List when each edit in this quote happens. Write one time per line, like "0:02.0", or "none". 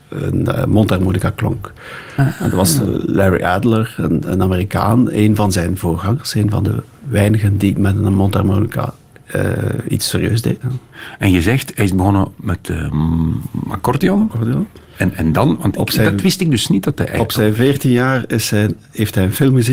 0:10.6